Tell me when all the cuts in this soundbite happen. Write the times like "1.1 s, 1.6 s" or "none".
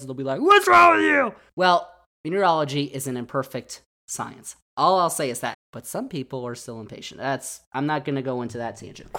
5.5 s